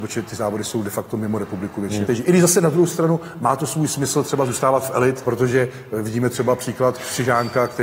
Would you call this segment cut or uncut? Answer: cut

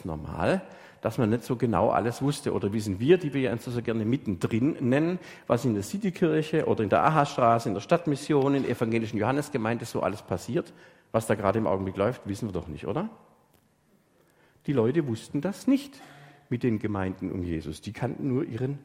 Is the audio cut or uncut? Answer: uncut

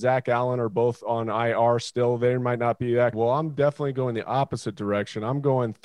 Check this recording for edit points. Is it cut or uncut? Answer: cut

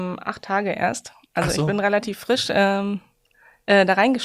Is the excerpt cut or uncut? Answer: uncut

